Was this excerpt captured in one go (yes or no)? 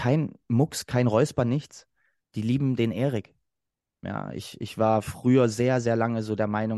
no